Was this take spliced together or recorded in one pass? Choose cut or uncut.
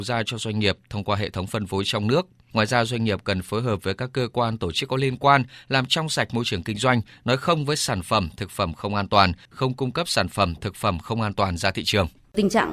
cut